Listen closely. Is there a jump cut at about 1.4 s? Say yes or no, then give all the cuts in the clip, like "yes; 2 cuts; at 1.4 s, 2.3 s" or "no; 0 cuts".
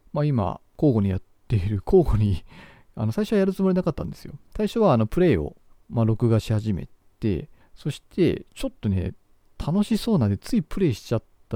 no; 0 cuts